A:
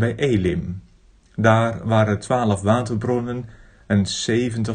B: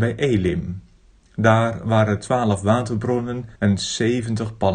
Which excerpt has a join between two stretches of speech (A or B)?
B